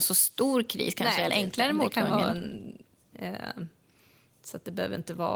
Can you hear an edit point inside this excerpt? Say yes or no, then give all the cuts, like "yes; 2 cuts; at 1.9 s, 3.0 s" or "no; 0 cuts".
yes; 2 cuts; at 1.3 s, 3.1 s